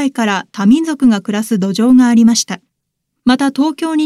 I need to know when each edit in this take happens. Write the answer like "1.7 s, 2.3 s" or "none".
none